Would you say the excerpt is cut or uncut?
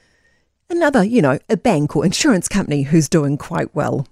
uncut